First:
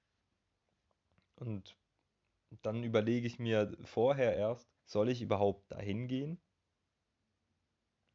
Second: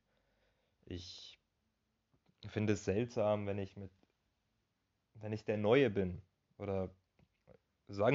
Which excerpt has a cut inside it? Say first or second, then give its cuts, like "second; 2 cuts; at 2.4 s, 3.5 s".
first; 1 cut; at 4.8 s